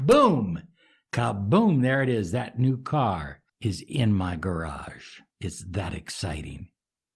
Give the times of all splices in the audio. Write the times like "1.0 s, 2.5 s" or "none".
3.5 s, 5.3 s

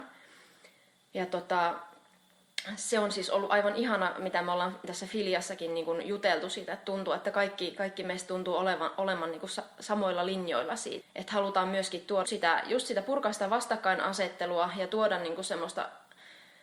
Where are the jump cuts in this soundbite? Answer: 11.0 s, 12.2 s

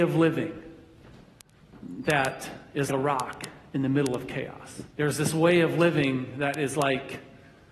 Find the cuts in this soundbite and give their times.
2.9 s, 4.9 s

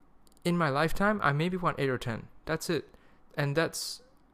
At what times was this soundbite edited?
none

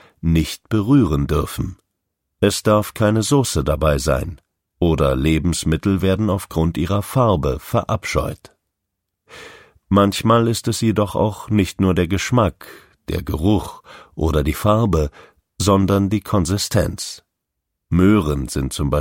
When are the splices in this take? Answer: none

